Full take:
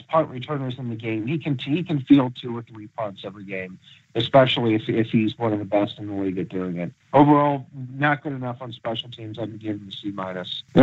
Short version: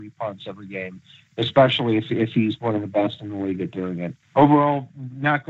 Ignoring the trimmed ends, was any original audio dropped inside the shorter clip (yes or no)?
no